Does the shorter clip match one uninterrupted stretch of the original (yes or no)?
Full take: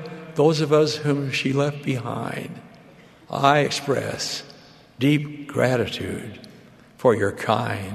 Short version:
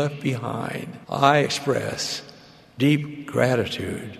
no